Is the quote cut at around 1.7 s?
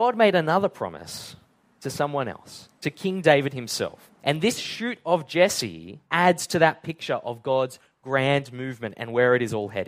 no; 2 cuts; at 4.2 s, 6.0 s

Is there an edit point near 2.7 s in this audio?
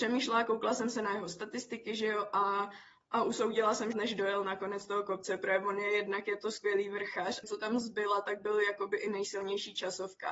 no; 2 cuts; at 3.9 s, 7.4 s

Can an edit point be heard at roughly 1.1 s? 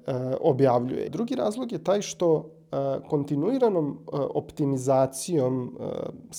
yes; 1 cut; at 1.1 s

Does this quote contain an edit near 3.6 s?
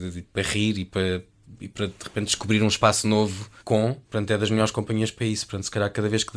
yes; 1 cut; at 3.6 s

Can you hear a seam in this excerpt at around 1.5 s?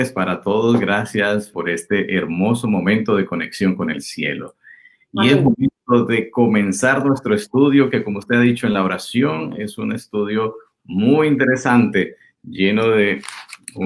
yes; 1 cut; at 1.5 s

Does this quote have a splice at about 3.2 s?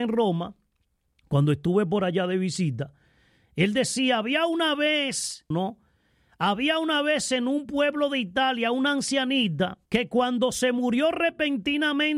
no; 2 cuts; at 5.5 s, 9.9 s

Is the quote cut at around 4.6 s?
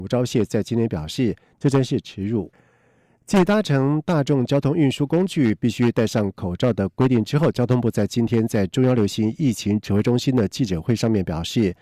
no; 1 cut; at 2.5 s

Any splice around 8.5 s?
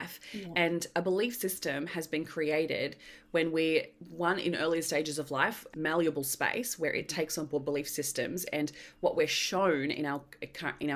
no; 1 cut; at 5.7 s

